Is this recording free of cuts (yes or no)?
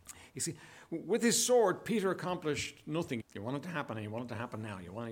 no